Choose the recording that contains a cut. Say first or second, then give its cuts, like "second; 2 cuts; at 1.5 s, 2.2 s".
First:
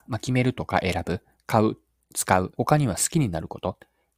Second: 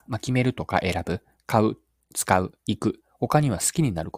first; 1 cut; at 2.5 s